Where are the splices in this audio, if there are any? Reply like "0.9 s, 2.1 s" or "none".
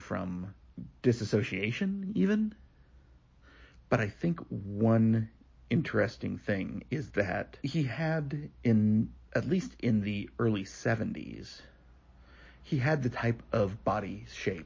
3.7 s, 7.6 s